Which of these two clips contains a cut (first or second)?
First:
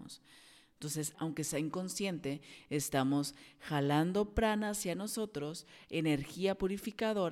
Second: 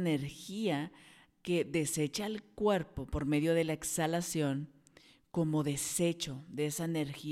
first